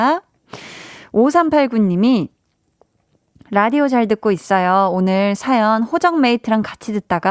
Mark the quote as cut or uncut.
uncut